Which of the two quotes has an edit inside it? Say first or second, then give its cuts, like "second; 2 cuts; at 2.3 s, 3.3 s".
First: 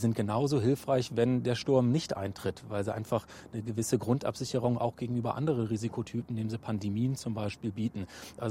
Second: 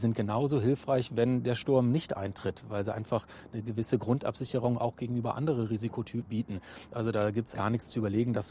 second; 2 cuts; at 6.3 s, 7.5 s